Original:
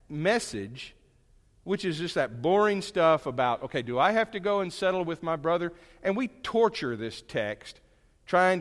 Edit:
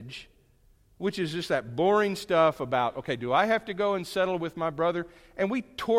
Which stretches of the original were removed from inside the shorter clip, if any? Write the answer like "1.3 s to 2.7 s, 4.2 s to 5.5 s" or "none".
none

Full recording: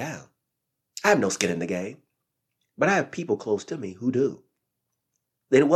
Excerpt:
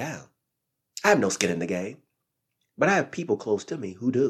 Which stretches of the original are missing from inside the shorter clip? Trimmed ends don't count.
none

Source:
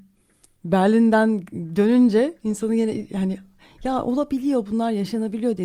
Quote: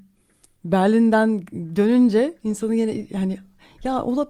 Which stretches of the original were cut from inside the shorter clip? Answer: none

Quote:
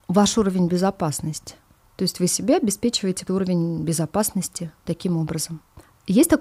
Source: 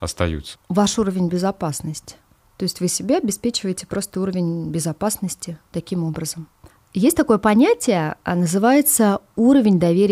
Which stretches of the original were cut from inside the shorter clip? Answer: 3.9 s to 4.1 s

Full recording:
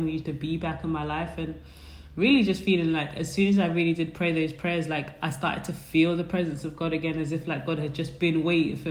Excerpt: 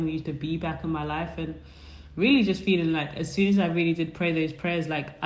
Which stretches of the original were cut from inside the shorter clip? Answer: none

